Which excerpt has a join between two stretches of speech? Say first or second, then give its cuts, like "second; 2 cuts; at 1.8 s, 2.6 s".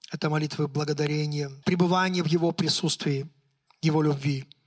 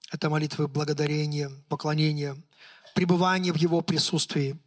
first; 1 cut; at 1.6 s